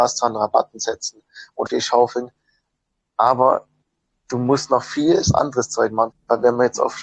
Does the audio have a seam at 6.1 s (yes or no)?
yes